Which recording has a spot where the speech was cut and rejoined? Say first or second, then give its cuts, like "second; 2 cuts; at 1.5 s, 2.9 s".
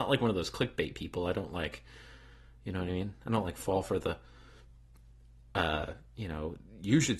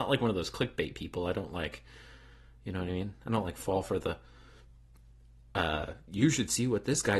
second; 1 cut; at 6.1 s